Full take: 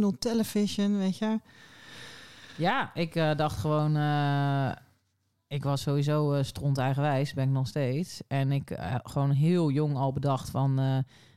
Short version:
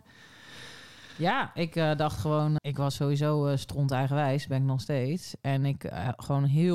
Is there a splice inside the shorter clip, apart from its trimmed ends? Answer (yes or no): yes